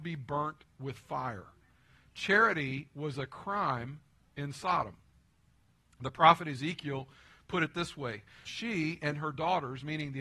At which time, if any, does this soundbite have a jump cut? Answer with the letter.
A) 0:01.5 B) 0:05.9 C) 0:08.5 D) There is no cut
C